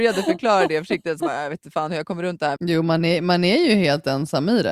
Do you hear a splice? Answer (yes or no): yes